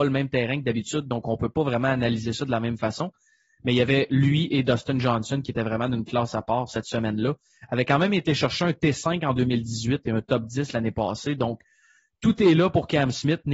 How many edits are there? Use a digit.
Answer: 0